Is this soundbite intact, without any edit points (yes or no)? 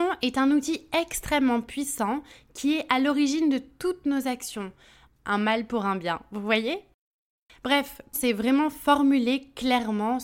no